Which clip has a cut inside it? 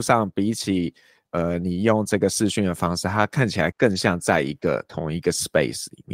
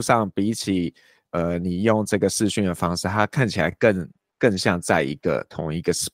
first; 1 cut; at 3.7 s

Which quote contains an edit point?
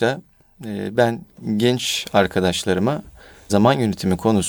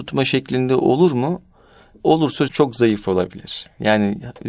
second; 1 cut; at 2.5 s

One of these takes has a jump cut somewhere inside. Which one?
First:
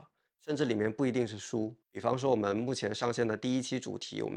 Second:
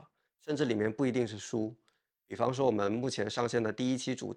first; 1 cut; at 1.8 s

